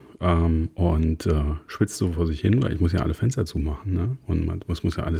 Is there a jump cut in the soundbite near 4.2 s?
no; 0 cuts

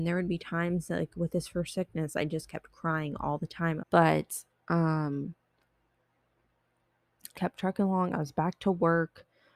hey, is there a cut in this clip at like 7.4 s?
yes; 2 cuts; at 3.8 s, 7.4 s

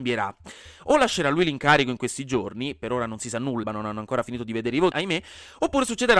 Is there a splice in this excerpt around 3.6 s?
yes; 2 cuts; at 3.6 s, 4.9 s

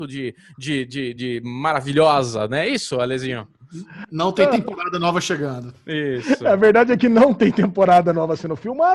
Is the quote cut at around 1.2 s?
yes; 1 cut; at 1.2 s

